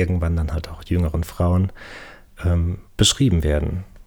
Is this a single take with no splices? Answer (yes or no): no